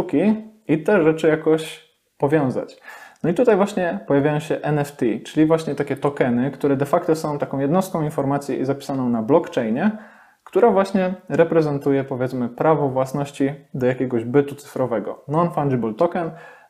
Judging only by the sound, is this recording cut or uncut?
uncut